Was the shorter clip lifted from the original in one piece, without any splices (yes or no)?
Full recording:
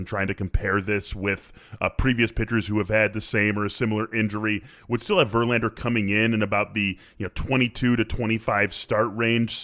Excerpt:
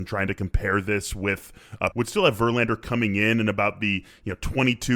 no